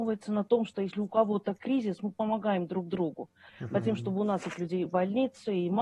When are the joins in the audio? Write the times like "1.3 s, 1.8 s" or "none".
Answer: 3.5 s, 4.9 s

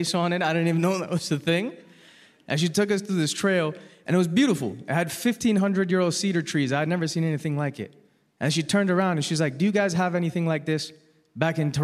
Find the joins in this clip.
none

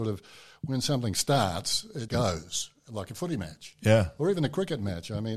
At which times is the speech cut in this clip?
2.1 s

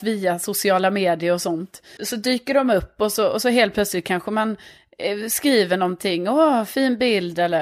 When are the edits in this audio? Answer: 2.0 s

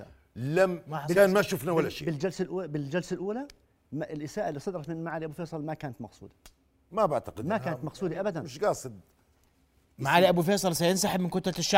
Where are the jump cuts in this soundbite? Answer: none

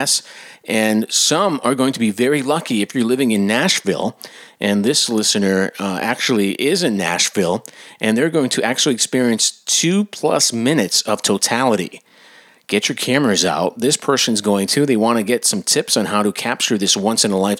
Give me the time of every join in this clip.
none

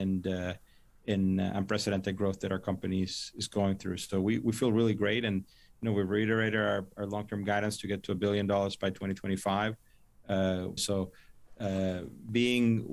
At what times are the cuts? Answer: 10.8 s

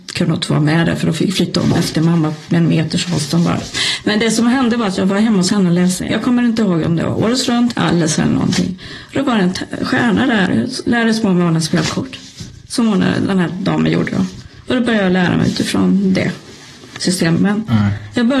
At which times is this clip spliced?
6.1 s, 7.7 s, 17.4 s

